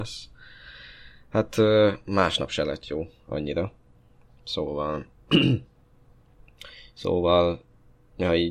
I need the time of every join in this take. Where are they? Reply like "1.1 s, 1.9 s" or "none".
none